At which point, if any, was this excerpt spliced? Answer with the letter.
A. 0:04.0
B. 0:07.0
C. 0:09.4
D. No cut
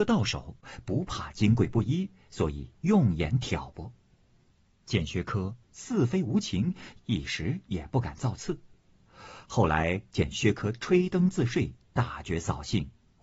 B